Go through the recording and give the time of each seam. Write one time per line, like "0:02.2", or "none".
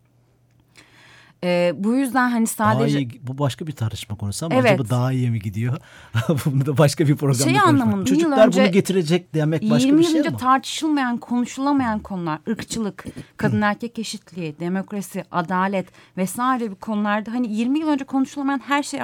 0:08.1